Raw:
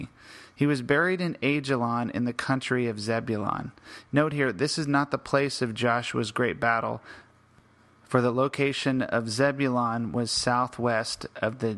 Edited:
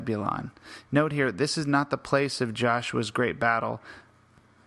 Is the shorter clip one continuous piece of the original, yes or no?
yes